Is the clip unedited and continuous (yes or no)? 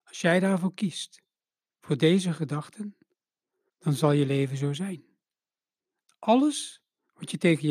no